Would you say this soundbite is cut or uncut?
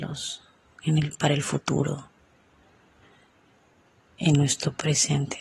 uncut